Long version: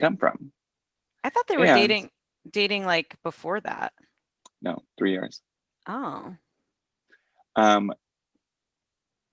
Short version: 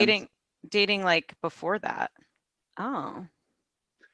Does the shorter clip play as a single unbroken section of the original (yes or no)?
no